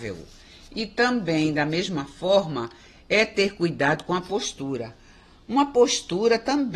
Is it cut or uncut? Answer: uncut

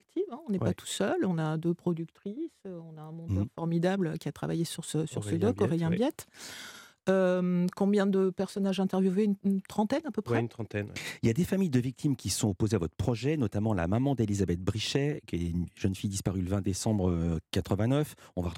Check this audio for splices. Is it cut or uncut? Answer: uncut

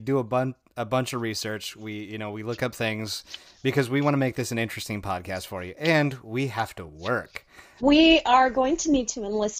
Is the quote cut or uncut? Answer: cut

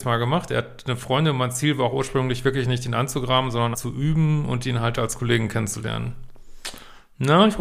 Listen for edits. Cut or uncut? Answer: cut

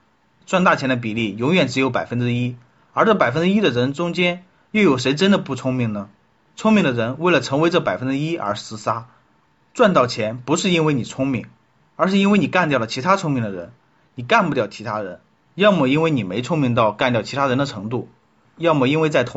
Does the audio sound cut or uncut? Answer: uncut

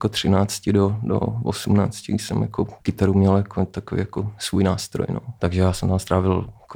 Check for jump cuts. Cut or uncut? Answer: cut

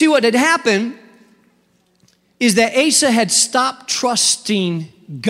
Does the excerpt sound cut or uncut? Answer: uncut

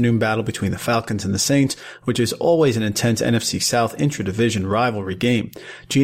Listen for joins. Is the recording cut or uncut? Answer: uncut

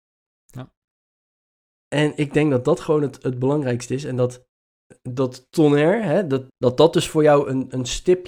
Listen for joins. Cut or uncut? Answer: cut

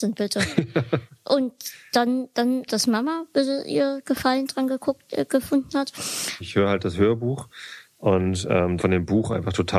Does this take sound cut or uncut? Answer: cut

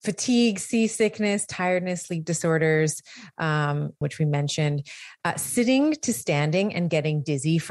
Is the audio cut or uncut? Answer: cut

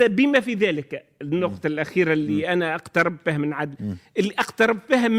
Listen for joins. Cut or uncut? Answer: uncut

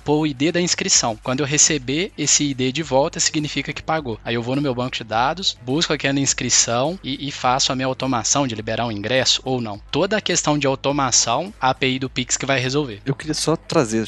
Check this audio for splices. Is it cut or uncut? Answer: uncut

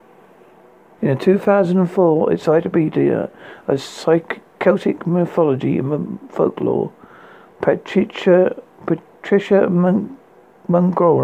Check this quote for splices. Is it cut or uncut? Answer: cut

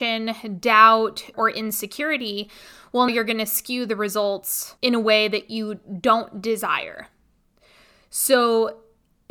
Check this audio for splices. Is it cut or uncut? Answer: cut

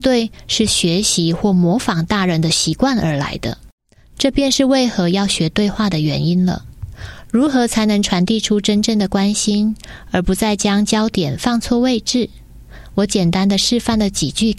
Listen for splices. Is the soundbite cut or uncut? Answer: uncut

